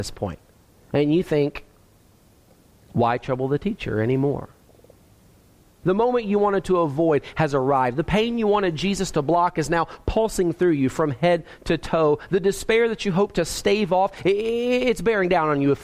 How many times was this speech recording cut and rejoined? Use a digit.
1